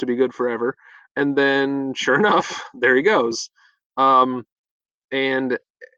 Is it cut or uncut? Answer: cut